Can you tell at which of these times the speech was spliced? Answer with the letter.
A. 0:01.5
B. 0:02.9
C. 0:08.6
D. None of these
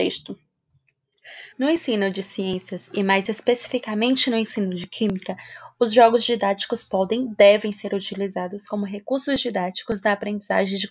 A